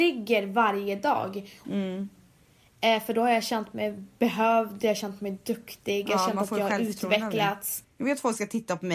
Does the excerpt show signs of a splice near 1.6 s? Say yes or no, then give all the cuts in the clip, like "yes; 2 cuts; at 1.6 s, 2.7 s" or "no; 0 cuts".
yes; 2 cuts; at 1.6 s, 7.8 s